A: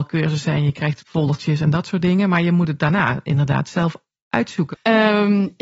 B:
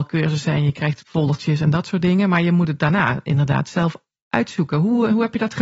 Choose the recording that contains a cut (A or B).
A